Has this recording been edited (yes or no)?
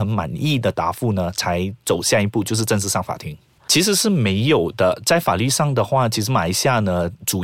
yes